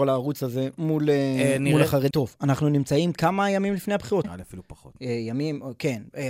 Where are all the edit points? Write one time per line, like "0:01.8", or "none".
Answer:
0:02.1
0:04.2